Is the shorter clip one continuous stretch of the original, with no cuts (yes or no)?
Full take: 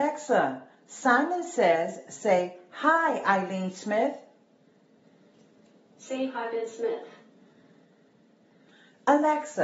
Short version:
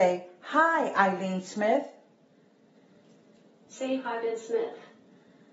yes